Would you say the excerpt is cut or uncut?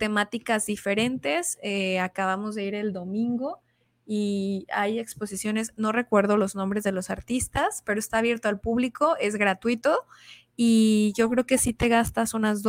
uncut